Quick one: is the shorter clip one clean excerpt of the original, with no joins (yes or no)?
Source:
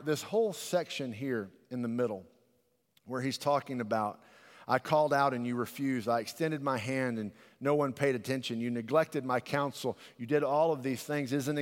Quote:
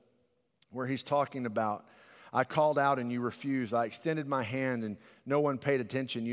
yes